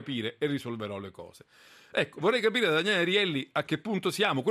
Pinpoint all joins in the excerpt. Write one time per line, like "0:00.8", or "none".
none